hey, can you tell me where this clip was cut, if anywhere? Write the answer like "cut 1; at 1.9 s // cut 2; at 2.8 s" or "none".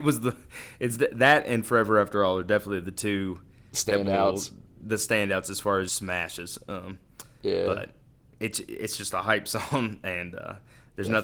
cut 1; at 5.9 s